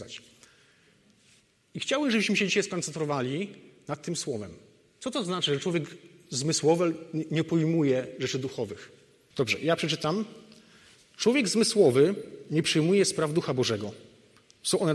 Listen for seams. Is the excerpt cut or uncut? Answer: cut